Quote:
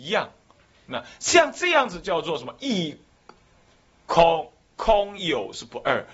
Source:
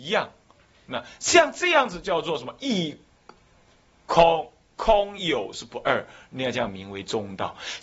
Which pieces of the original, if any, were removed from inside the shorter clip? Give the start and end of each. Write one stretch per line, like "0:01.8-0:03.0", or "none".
none